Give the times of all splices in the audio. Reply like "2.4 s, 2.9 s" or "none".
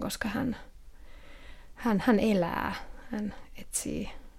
none